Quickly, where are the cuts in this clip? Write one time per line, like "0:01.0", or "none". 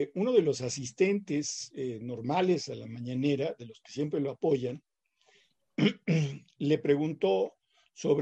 none